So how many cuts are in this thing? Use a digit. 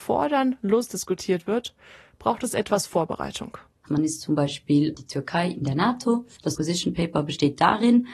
2